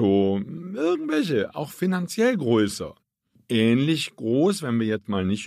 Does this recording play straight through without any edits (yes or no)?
yes